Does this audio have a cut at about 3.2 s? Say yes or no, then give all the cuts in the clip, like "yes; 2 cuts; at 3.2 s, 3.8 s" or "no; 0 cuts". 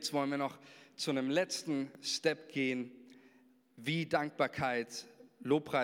no; 0 cuts